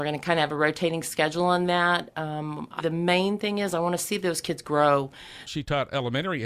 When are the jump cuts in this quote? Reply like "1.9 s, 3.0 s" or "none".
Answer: 2.8 s, 5.5 s